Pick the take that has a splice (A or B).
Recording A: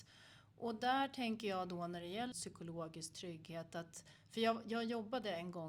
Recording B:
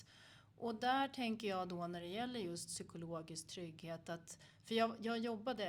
A